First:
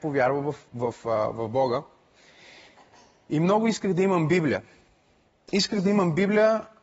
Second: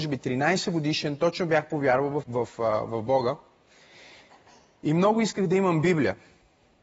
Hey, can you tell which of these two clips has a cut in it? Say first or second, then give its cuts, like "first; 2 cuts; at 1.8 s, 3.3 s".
second; 1 cut; at 2.2 s